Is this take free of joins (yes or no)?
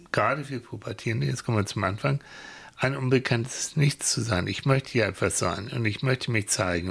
yes